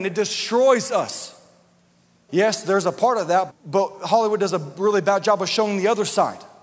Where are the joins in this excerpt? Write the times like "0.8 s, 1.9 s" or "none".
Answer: 2.3 s, 3.5 s